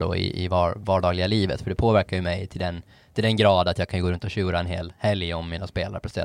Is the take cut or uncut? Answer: uncut